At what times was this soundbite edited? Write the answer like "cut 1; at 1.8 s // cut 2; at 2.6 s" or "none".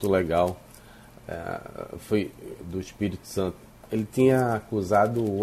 cut 1; at 2.6 s